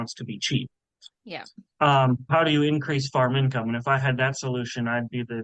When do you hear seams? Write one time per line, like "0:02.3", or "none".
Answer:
0:02.3

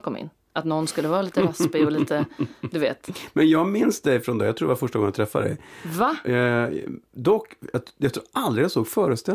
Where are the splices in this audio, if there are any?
none

